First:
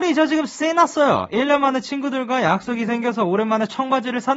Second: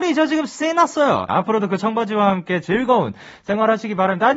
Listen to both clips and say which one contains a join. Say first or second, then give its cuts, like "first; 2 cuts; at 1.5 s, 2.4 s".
second; 1 cut; at 1.3 s